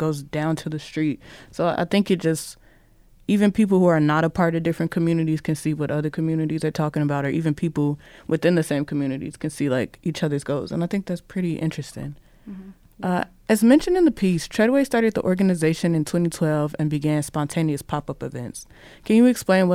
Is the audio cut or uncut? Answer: uncut